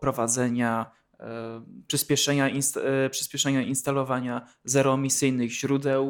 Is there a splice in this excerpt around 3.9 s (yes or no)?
no